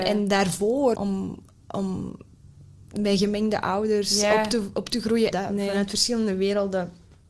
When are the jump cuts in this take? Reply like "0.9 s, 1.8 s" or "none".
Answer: 0.9 s, 5.3 s